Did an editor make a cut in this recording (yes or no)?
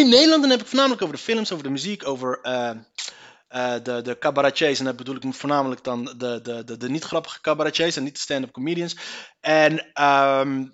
no